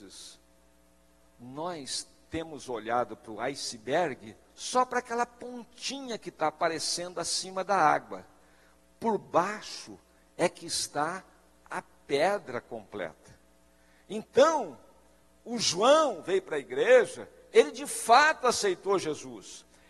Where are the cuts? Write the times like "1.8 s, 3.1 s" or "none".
none